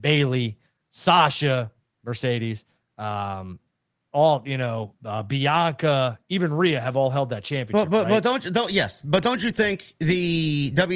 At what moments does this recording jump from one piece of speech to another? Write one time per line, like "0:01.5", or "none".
none